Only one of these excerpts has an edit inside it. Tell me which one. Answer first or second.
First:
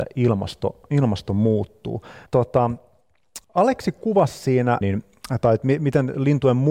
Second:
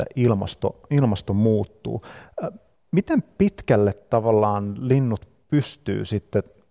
first